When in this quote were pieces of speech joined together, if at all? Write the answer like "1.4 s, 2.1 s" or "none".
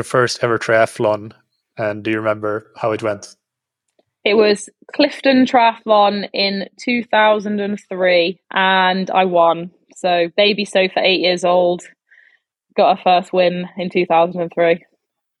8.4 s